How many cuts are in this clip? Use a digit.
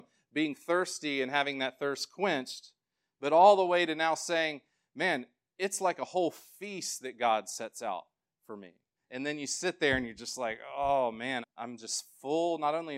2